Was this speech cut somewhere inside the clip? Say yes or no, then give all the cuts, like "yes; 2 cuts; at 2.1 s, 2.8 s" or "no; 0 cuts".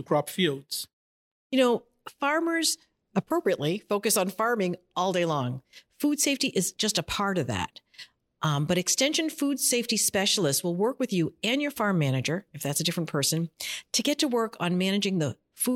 no; 0 cuts